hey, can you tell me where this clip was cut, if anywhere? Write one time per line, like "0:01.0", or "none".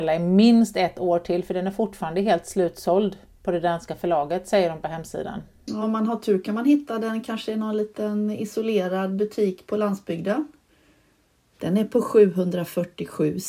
0:05.8
0:11.5